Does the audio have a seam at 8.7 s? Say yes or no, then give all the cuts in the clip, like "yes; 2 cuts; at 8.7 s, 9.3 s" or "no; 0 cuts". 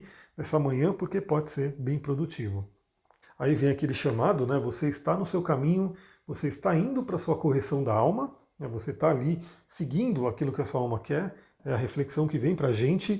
no; 1 cut; at 3.2 s